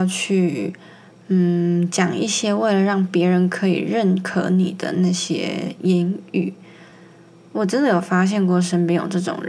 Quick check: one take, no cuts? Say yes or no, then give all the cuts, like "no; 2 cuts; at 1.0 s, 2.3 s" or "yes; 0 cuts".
yes; 0 cuts